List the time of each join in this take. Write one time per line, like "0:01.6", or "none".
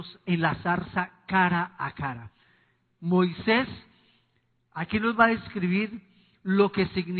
none